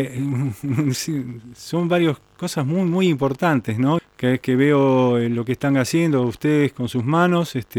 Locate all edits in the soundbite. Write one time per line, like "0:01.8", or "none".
0:04.0